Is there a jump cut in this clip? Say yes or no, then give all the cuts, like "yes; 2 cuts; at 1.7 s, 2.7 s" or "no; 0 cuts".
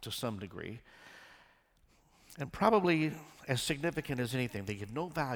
no; 0 cuts